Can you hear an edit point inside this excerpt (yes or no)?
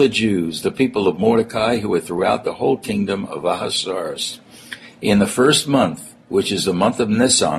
no